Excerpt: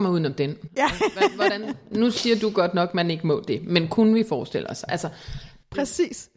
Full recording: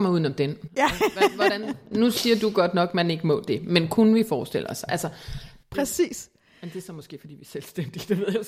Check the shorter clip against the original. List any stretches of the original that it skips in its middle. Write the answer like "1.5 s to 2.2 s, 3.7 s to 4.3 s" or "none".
none

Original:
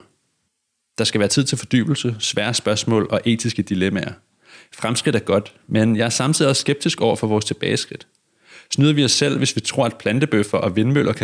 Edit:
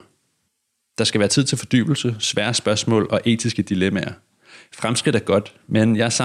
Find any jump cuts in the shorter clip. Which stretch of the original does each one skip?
none

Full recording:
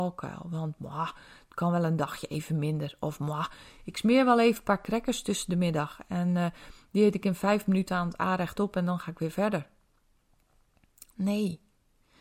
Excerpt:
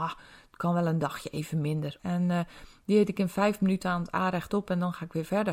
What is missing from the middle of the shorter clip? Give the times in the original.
3.0 s to 6.1 s

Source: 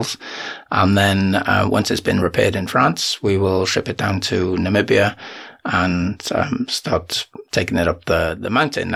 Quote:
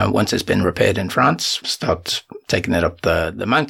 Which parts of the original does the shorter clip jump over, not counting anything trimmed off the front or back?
3.2 s to 6.7 s

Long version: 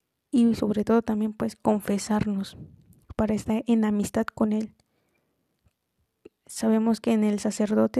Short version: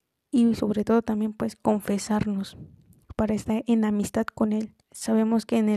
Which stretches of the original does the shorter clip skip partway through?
4.8 s to 6.4 s

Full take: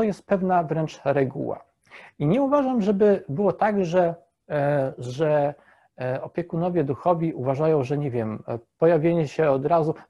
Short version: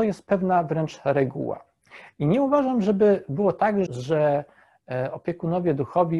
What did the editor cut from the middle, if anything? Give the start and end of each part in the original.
3.9 s to 5.0 s

